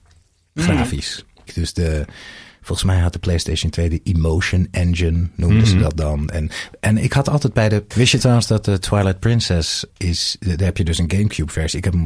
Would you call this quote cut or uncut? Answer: cut